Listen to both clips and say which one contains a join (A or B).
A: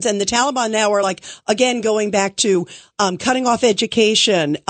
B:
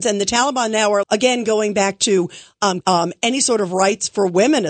B